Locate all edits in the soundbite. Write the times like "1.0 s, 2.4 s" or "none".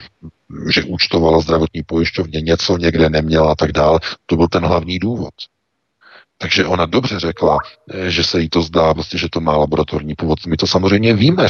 4.2 s

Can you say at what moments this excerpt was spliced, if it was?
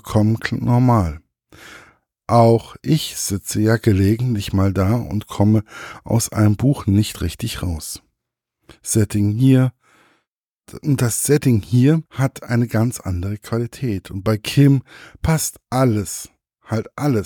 12.1 s

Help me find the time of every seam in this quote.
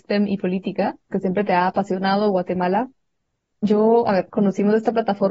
1.1 s, 4.3 s

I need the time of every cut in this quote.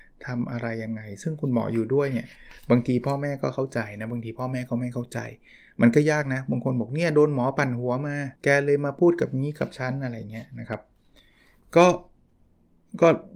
8.4 s

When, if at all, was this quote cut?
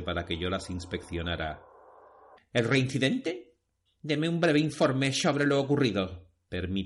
2.4 s, 3.9 s

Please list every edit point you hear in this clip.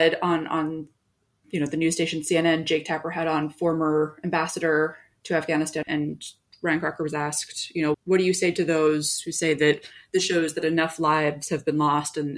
5.8 s, 7.9 s

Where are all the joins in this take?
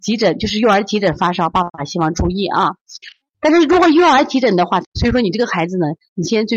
3.2 s, 4.8 s

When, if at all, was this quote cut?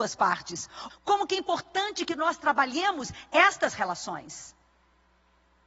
0.9 s

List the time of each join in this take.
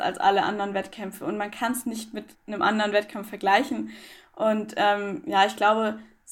2.3 s

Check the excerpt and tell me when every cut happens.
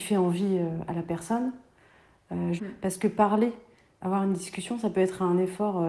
2.6 s, 4.0 s

